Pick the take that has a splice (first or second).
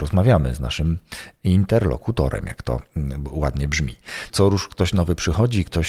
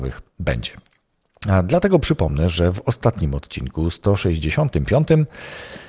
first